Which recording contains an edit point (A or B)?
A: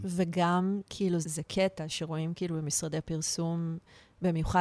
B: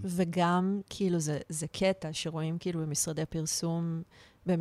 A